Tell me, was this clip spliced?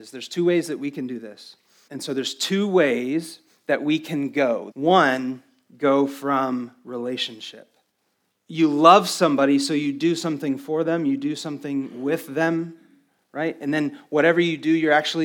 yes; 3 cuts; at 1.9 s, 4.7 s, 8.3 s

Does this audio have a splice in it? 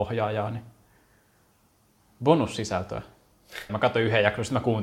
yes; 1 cut; at 3.7 s

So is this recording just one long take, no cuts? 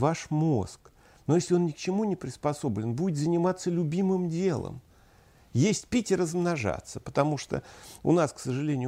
yes; 0 cuts

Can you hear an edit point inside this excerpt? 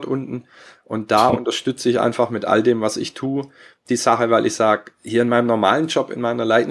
no; 0 cuts

